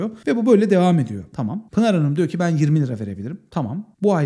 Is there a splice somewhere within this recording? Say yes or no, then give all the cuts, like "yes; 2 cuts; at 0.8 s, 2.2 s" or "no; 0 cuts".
yes; 1 cut; at 1.3 s